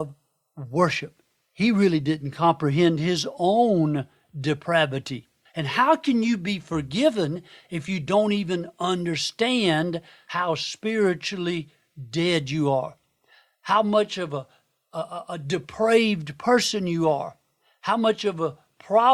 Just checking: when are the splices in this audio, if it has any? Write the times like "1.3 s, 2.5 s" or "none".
5.5 s